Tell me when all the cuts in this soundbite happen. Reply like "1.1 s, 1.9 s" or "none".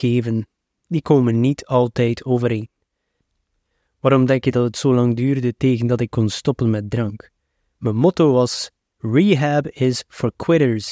none